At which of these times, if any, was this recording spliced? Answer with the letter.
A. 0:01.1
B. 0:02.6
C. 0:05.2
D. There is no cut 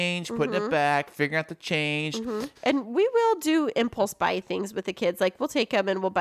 B